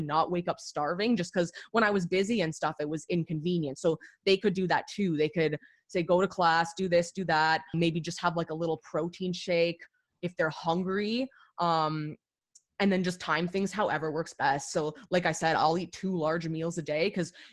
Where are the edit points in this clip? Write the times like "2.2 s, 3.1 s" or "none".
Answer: 7.7 s